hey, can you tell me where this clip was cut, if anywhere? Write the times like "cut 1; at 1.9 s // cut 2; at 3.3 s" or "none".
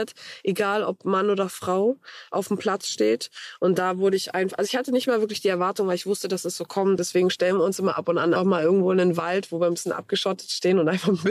cut 1; at 7.0 s // cut 2; at 8.4 s

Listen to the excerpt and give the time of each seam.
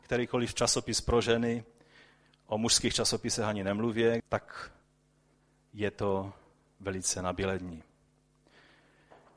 cut 1; at 4.2 s

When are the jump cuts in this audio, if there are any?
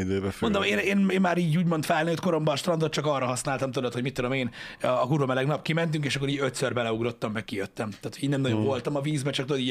none

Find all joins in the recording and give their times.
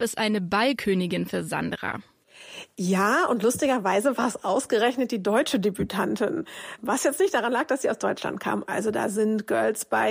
cut 1; at 8.7 s

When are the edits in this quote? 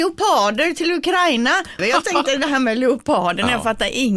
cut 1; at 1.8 s

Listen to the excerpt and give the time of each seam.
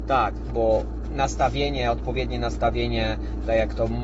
none

